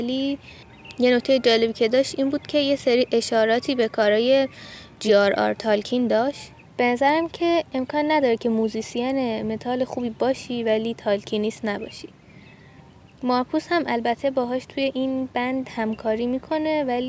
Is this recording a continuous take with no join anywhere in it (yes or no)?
yes